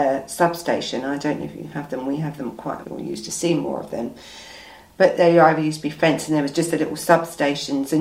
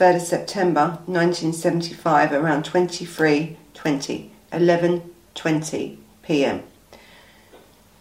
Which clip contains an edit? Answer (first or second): first